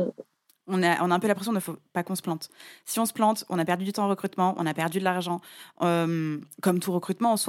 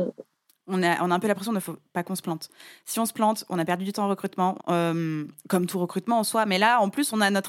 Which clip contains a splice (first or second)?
second